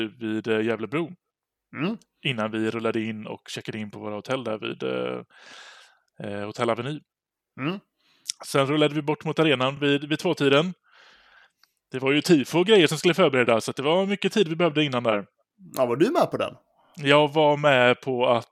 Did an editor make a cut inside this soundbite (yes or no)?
no